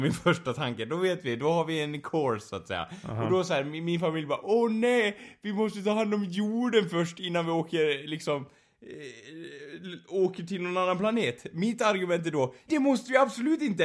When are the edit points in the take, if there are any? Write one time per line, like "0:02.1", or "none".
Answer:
0:12.7